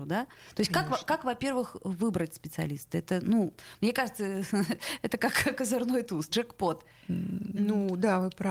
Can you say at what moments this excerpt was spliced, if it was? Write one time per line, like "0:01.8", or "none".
0:06.3